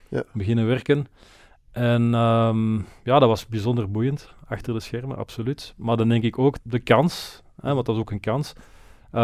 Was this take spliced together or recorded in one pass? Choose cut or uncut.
cut